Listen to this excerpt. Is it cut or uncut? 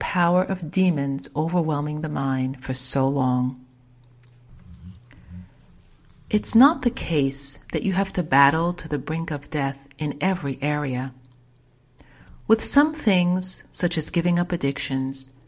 uncut